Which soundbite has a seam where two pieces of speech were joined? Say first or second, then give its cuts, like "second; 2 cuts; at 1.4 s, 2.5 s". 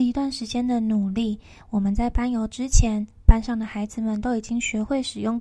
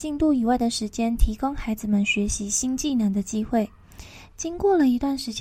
second; 1 cut; at 4.3 s